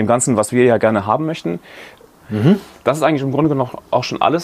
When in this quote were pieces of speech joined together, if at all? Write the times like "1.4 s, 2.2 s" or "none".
2.2 s